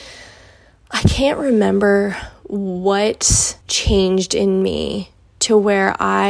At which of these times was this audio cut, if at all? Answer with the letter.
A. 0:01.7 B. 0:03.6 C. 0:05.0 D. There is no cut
B